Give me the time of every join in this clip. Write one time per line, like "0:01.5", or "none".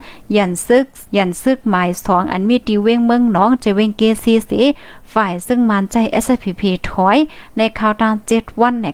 0:01.1